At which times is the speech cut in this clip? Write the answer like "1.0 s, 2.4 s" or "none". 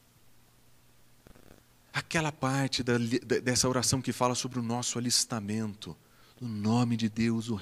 none